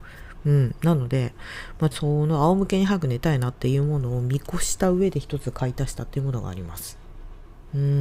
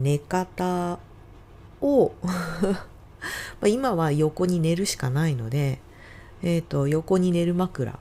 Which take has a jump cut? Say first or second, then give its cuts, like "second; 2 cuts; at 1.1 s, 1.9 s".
first; 1 cut; at 1.9 s